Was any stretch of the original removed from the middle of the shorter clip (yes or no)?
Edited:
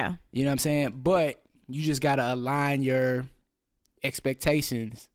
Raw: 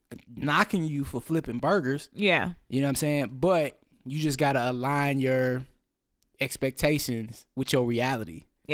no